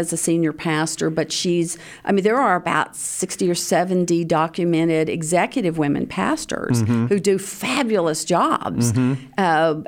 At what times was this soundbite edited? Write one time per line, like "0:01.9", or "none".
none